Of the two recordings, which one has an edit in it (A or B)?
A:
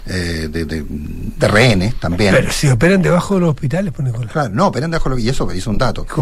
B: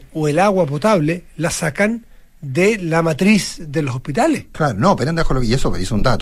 B